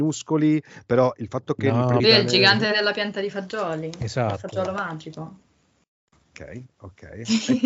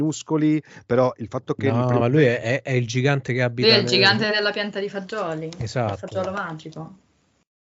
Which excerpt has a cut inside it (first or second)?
first